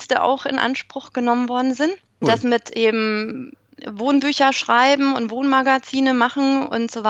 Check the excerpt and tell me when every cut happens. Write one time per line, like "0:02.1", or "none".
0:02.2